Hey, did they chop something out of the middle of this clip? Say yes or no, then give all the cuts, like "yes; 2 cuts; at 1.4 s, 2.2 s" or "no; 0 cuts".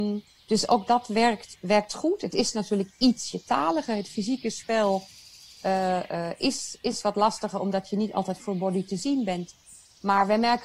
no; 0 cuts